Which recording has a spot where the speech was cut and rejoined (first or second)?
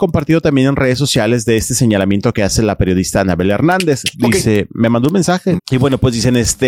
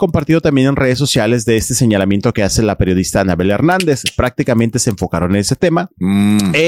first